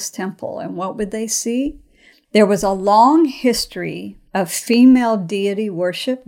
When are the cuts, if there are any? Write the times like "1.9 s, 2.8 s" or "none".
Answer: 2.2 s, 4.3 s